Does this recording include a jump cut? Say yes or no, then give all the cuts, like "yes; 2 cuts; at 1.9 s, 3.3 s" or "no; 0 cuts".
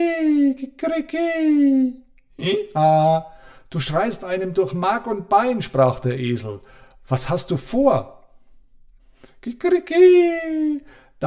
no; 0 cuts